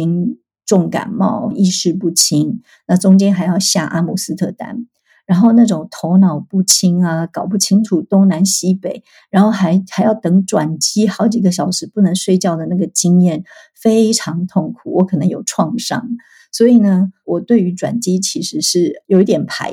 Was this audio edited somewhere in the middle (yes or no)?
yes